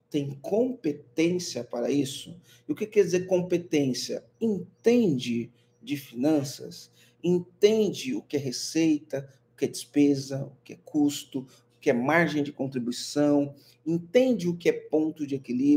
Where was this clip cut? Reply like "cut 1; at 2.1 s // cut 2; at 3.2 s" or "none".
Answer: none